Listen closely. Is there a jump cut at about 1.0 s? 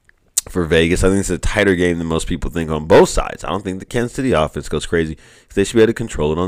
no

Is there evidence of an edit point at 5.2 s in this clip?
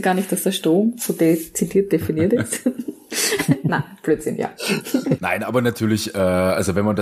yes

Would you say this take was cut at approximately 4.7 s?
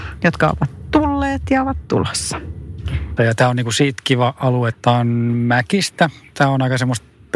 yes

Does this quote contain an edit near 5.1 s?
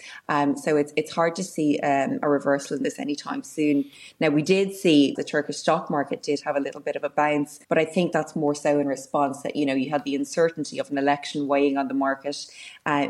yes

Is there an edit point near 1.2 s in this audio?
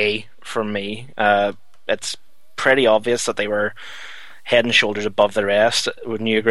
no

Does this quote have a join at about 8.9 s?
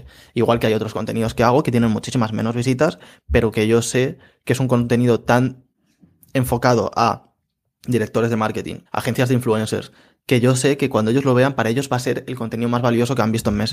yes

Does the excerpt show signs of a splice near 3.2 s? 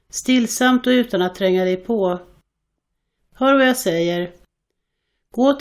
yes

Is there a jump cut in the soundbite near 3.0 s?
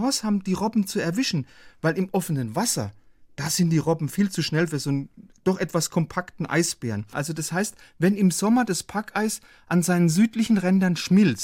no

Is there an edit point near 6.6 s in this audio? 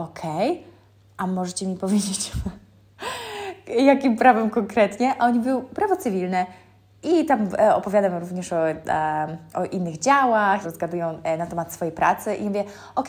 no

